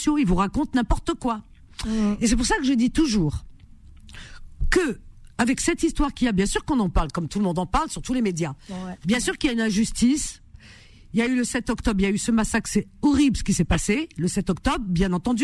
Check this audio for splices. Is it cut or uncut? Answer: uncut